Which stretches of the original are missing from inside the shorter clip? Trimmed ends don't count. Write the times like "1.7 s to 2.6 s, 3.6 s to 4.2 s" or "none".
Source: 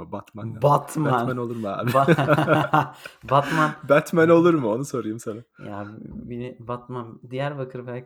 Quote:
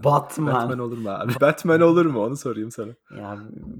1.9 s to 3.8 s